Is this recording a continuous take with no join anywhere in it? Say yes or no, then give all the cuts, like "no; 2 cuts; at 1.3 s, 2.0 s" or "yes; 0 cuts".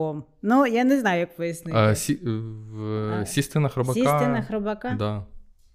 yes; 0 cuts